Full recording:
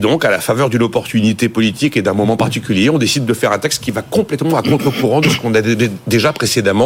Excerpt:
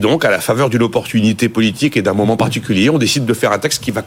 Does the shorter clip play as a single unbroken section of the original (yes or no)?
yes